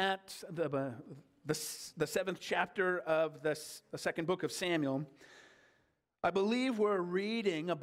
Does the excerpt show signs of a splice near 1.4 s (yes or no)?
no